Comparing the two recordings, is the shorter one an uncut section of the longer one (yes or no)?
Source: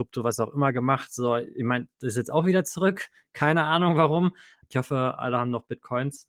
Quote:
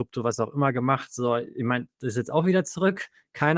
yes